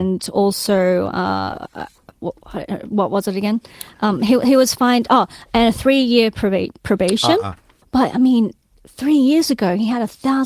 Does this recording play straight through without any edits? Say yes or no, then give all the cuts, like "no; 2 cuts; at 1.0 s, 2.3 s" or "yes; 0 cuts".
no; 1 cut; at 7.8 s